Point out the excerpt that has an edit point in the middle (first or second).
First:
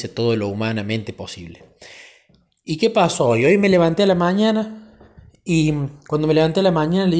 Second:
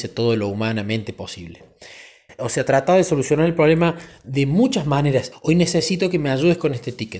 second